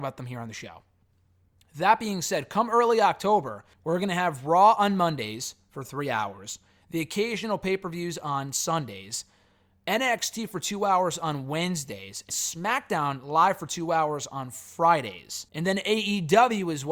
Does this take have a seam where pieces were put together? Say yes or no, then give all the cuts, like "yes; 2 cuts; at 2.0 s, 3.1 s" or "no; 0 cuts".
yes; 3 cuts; at 3.7 s, 12.3 s, 15.5 s